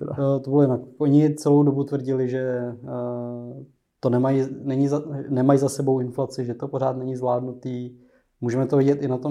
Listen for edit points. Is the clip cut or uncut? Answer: uncut